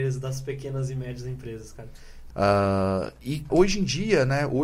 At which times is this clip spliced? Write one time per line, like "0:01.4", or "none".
0:02.3
0:03.5

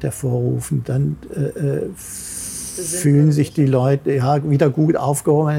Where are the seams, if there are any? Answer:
none

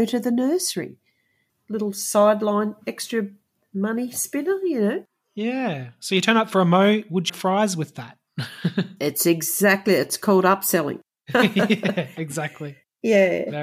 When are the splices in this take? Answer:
0:01.5
0:07.3

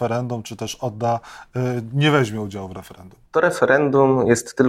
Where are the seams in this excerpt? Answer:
0:03.3

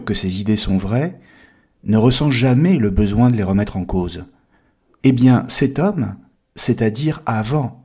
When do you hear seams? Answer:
0:05.0
0:06.3

